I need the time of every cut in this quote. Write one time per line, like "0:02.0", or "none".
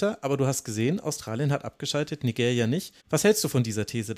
0:03.0